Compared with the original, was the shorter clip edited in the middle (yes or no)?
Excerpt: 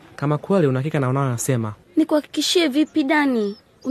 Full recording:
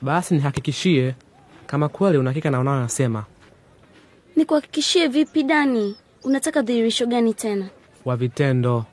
yes